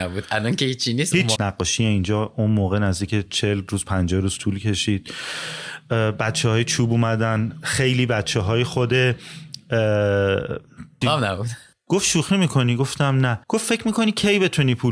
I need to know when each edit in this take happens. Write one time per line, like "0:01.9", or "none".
0:01.4
0:11.0
0:13.4